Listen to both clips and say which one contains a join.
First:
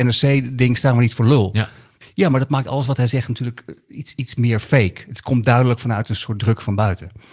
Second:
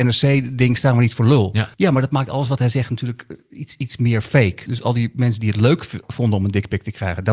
second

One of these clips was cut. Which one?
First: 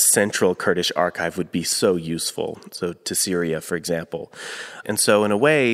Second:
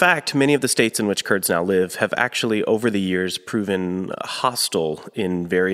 first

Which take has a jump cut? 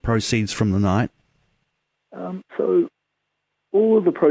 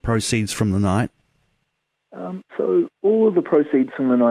second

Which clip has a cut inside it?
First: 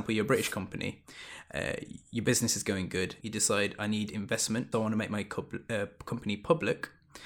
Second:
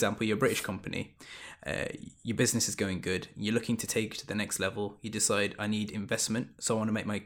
first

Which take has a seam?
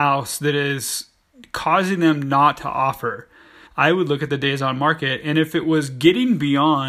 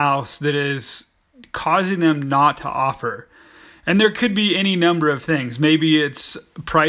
first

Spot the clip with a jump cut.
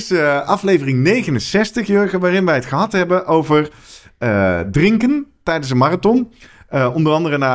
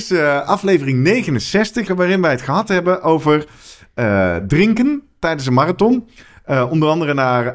second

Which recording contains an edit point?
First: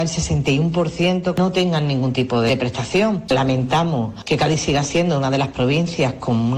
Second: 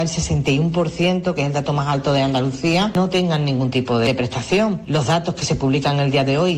first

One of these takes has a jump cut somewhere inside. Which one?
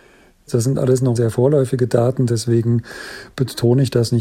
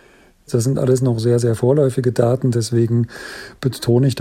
first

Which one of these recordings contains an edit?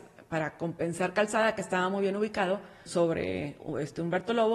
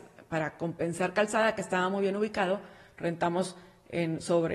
first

